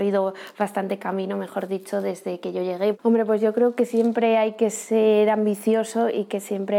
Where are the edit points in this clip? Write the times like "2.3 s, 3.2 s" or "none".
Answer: 2.9 s